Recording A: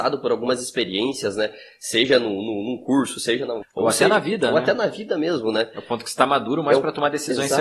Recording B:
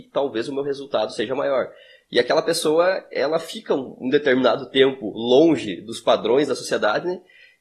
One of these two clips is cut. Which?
A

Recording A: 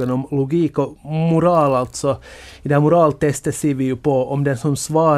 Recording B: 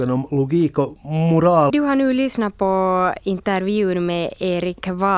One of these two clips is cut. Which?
B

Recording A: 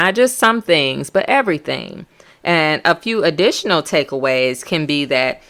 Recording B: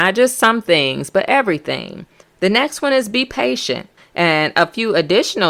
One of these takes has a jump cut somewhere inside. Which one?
B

